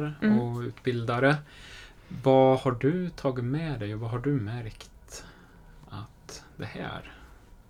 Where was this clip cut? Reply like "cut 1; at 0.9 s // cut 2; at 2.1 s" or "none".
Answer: none